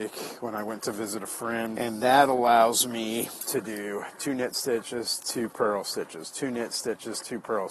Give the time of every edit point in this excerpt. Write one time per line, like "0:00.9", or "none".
0:01.8